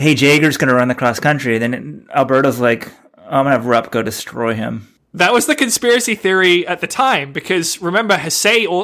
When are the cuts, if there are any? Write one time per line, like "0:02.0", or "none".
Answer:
none